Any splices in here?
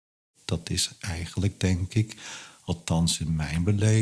no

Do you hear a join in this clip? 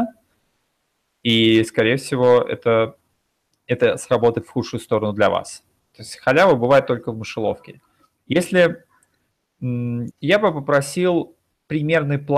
yes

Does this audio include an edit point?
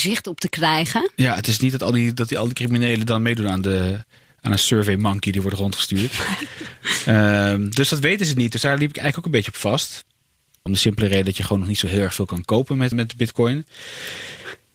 yes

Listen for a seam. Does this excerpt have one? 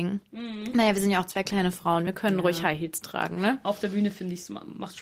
no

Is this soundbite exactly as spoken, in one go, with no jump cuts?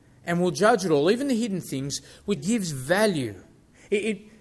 no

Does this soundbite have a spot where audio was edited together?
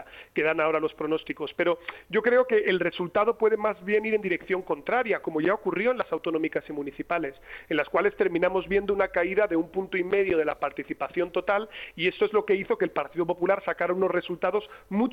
no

